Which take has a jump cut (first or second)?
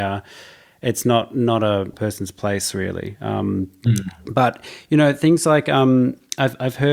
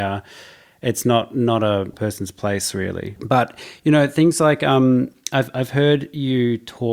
second